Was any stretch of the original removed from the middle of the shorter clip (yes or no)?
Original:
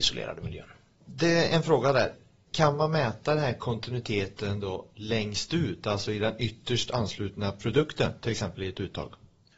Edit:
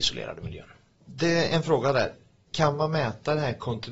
no